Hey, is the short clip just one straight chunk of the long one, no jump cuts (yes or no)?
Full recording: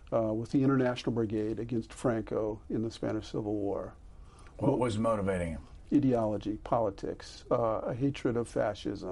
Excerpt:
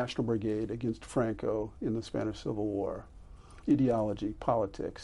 no